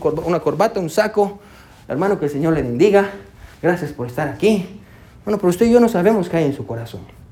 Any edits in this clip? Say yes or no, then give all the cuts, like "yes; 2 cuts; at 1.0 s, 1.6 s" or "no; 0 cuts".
no; 0 cuts